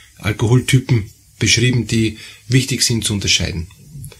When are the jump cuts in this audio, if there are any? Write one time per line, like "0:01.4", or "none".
none